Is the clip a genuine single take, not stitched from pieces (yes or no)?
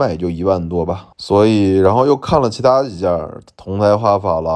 no